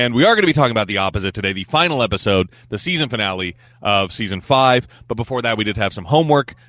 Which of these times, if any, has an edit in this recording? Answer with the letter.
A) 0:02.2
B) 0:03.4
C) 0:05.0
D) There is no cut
D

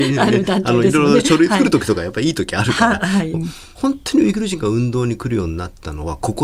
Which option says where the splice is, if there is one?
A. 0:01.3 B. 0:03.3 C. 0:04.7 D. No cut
B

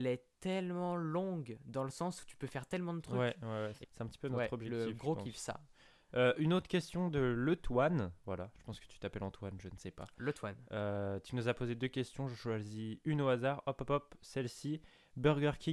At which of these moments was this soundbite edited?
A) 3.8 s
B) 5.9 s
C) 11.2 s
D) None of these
A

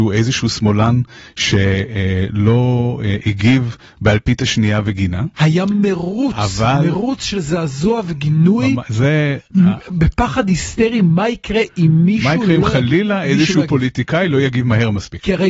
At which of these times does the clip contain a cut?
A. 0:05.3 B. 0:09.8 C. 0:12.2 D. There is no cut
D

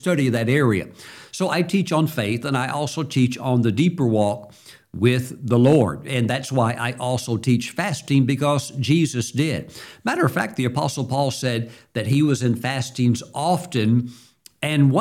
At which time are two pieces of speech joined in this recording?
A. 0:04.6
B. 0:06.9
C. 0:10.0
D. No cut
D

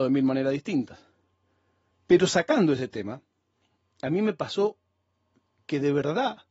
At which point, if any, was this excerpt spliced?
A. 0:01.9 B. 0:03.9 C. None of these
A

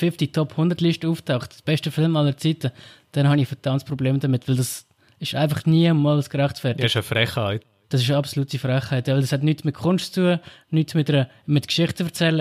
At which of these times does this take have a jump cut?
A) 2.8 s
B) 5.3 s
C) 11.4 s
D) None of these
D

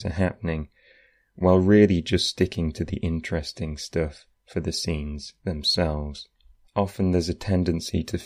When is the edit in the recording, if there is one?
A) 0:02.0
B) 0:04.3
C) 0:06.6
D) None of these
C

